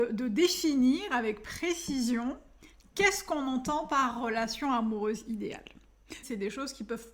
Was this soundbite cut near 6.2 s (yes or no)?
yes